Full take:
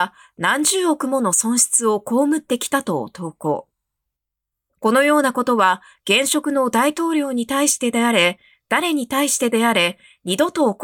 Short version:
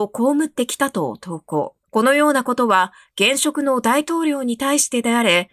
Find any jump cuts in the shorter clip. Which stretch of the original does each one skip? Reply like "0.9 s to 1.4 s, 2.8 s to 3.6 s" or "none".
3.8 s to 4.7 s